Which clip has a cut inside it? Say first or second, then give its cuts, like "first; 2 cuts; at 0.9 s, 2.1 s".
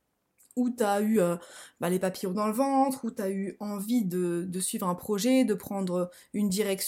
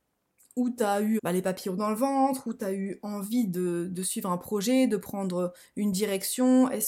second; 1 cut; at 1.2 s